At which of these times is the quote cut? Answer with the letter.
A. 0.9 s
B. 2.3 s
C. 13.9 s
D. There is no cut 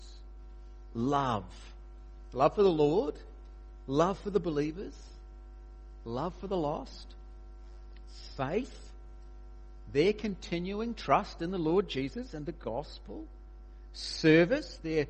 D